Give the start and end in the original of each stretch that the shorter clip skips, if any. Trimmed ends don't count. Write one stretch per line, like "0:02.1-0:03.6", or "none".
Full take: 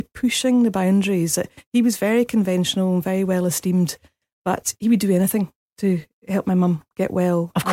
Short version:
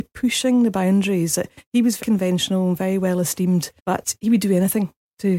0:02.0-0:02.3
0:04.0-0:04.4